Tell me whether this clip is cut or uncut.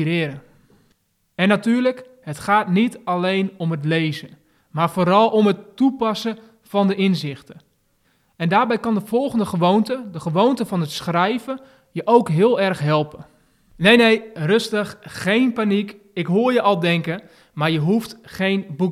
uncut